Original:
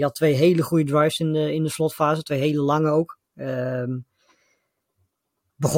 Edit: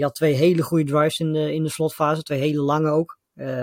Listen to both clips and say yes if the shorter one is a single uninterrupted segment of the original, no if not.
yes